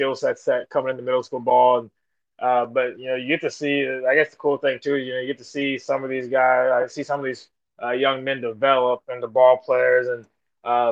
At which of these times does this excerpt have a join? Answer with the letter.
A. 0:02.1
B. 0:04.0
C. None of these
C